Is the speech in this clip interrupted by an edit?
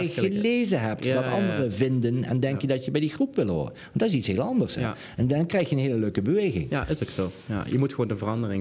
no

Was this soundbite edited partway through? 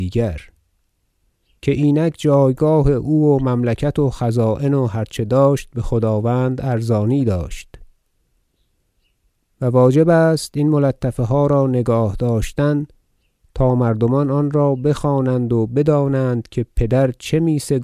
no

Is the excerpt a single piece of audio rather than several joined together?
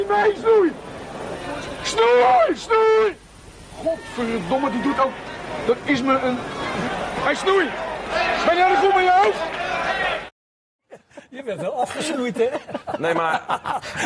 yes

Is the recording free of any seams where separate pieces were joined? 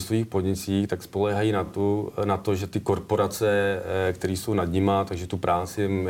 yes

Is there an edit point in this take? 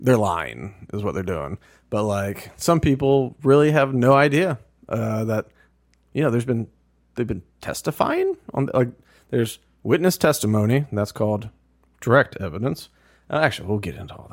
no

